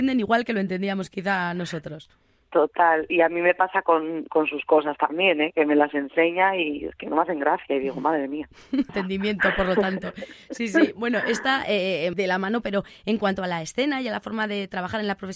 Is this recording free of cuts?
no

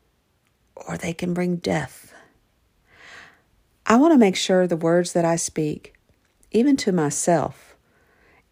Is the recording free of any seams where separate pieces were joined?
yes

